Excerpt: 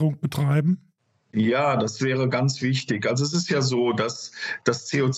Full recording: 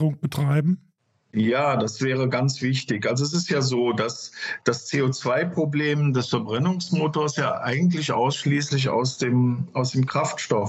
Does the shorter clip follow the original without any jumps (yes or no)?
yes